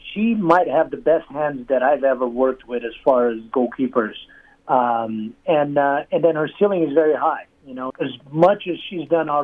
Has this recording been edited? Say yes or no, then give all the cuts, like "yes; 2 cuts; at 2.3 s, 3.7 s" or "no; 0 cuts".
yes; 1 cut; at 7.9 s